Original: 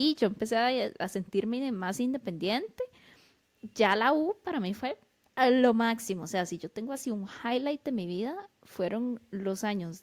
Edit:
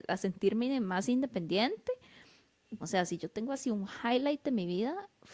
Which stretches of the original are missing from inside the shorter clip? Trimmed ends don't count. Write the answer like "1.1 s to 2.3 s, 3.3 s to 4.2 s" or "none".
3.7 s to 6.2 s